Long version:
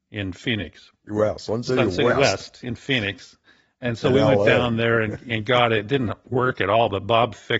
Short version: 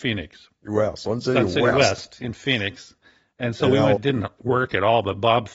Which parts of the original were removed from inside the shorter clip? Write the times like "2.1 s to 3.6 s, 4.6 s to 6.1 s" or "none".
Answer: 4.4 s to 5.8 s